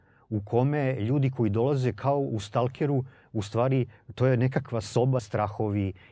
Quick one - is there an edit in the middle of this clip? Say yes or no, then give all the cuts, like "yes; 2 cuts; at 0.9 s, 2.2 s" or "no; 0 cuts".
yes; 1 cut; at 5.2 s